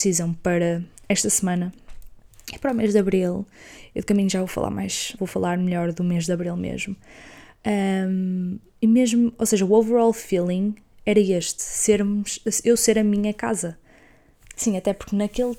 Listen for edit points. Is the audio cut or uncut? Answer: cut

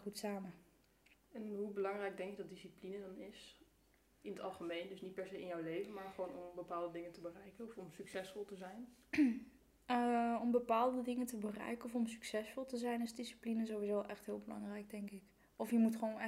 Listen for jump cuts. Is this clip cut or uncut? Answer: uncut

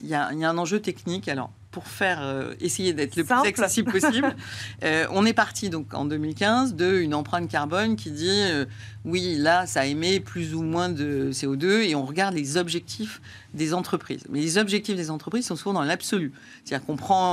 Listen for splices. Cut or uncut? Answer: uncut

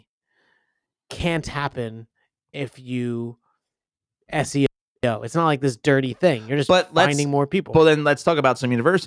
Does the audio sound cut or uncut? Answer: uncut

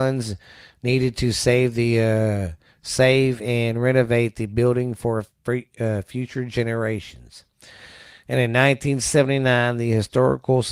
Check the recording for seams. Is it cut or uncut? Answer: uncut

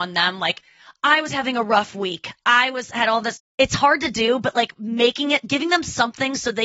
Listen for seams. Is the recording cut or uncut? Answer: uncut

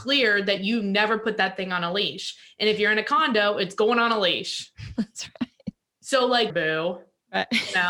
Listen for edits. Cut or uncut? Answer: cut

